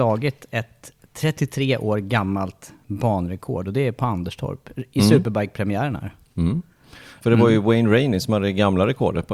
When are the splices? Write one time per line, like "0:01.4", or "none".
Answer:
0:07.2